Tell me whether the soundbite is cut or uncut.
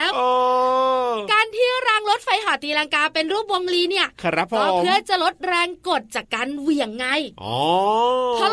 cut